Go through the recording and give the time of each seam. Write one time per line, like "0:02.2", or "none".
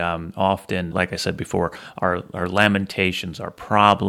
0:00.9